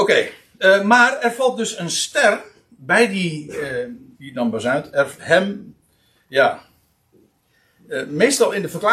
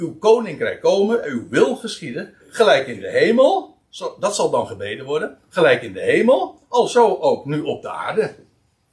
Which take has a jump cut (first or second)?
first